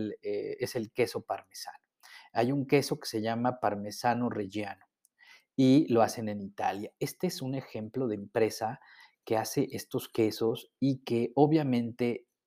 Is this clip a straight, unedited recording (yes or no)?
yes